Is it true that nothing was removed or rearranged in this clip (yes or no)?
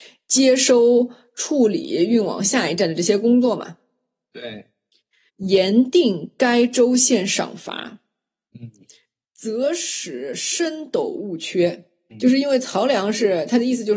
no